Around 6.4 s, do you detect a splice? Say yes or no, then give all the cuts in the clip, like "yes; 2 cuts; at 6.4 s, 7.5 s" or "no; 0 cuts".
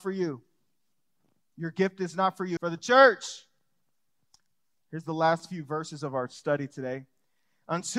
no; 1 cut; at 2.6 s